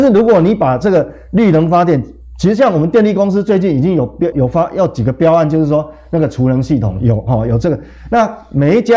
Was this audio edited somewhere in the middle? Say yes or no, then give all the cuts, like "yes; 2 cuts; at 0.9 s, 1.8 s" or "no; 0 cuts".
yes; 1 cut; at 4.3 s